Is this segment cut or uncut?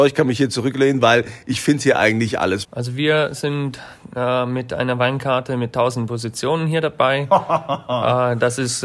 cut